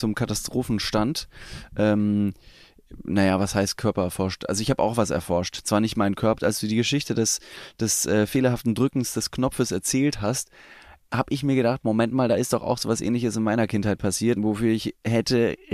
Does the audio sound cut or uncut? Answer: cut